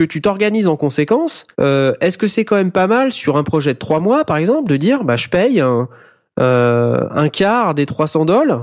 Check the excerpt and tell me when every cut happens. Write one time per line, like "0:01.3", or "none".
0:01.5